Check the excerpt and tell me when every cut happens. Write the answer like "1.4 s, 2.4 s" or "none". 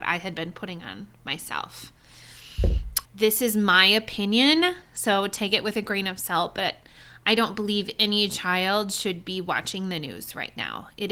3.0 s